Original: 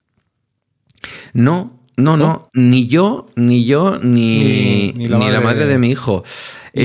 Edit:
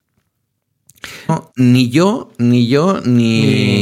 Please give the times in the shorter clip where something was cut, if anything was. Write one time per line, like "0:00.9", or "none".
0:01.3